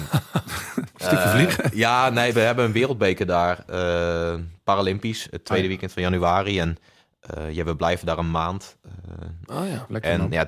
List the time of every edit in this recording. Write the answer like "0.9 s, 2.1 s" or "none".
2.3 s, 9.5 s